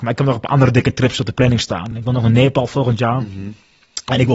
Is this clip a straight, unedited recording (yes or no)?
yes